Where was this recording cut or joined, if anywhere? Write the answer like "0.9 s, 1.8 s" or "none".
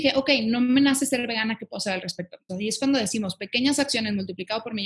2.5 s